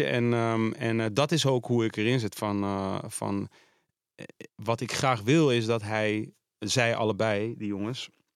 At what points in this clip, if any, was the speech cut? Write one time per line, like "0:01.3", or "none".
0:04.5